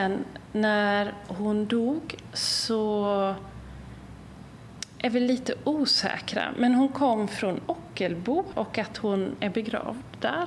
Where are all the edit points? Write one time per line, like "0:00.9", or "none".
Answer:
0:08.5